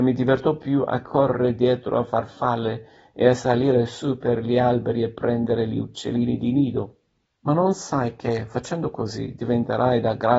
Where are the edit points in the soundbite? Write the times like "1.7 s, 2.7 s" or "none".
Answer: 7.3 s